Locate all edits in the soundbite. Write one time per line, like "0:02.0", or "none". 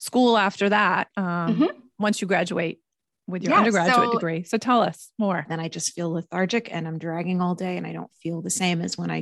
0:01.1
0:05.5